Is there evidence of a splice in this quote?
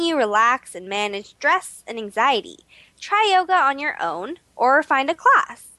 no; 0 cuts

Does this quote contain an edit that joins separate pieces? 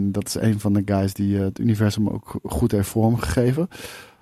no; 0 cuts

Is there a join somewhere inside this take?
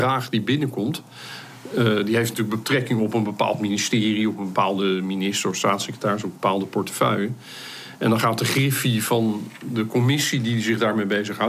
no; 0 cuts

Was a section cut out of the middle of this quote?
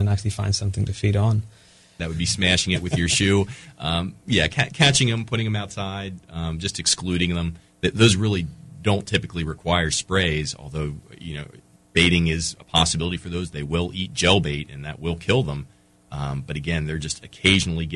yes; 1 cut; at 2.0 s

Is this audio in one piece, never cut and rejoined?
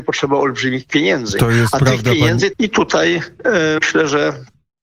no; 2 cuts; at 2.5 s, 3.8 s

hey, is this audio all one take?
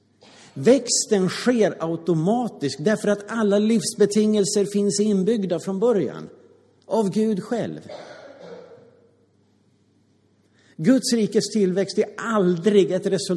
yes; 0 cuts

